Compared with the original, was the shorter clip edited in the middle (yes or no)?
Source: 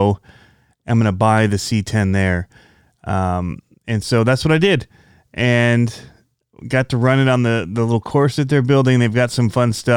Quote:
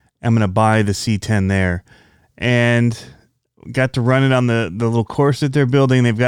yes